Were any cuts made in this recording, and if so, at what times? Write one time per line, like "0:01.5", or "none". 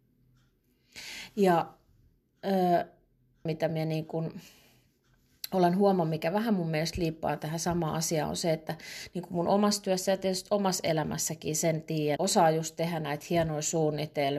0:03.5
0:12.2